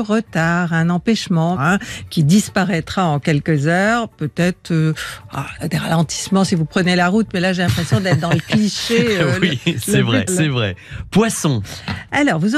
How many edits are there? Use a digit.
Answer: 2